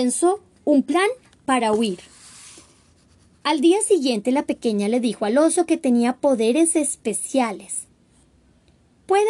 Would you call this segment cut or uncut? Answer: uncut